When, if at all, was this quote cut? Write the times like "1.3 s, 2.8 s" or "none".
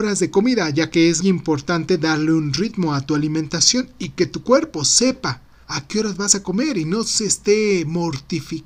1.2 s, 5.6 s